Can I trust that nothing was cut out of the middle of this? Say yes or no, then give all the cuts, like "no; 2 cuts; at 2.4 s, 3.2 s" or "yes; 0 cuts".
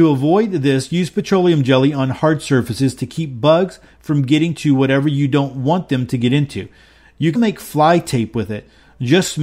no; 1 cut; at 7.4 s